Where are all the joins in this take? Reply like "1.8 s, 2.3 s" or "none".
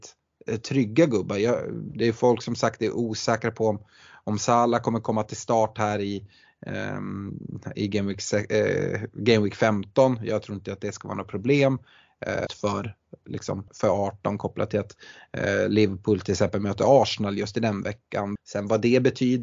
12.5 s, 13.7 s, 18.4 s